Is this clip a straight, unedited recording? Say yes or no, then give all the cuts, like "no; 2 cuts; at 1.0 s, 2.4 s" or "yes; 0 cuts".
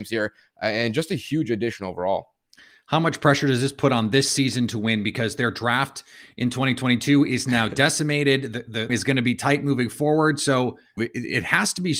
no; 2 cuts; at 8.9 s, 11.0 s